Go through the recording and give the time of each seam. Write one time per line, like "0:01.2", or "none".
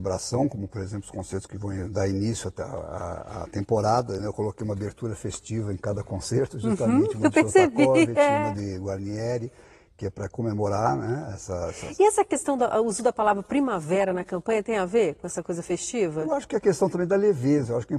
none